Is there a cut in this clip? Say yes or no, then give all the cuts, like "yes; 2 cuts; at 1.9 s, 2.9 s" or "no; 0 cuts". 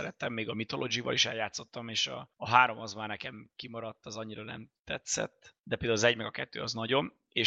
yes; 2 cuts; at 2.3 s, 5.6 s